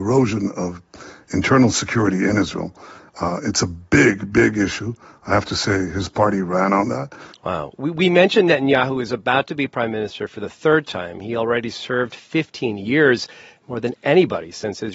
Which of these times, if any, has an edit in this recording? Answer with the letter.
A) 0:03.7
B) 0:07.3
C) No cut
B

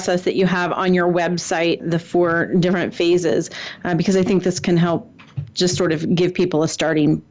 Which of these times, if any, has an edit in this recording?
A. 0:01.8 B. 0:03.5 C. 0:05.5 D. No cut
A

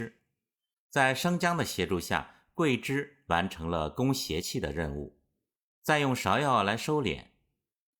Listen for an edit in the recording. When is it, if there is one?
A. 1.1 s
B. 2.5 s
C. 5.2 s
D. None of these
D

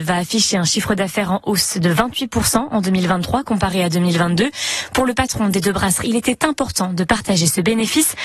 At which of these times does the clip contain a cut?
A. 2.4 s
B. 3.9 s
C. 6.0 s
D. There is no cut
C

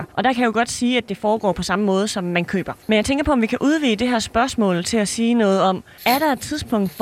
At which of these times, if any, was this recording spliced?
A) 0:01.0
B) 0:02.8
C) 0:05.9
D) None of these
B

